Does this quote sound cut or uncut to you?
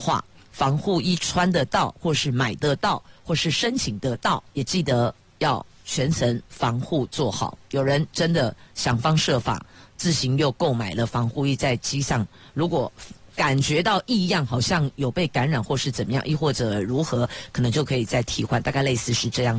cut